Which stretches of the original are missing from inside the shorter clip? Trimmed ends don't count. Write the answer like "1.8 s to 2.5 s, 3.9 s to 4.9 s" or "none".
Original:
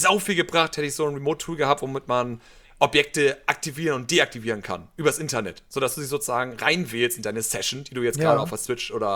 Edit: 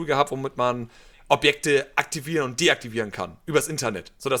none